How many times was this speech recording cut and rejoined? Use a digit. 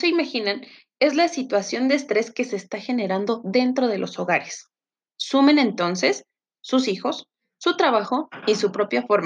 1